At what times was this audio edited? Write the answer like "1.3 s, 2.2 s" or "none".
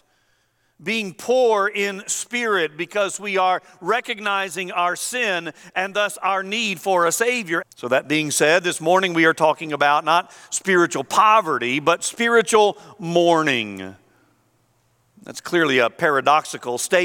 7.6 s